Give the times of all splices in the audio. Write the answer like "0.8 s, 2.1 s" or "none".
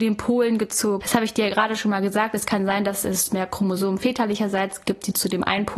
1.0 s